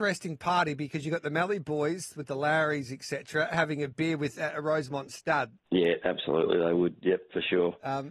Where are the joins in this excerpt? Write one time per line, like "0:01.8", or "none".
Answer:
0:05.7